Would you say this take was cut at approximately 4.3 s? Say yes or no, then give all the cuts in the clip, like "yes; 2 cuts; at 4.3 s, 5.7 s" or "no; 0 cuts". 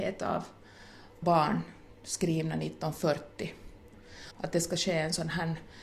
yes; 1 cut; at 4.3 s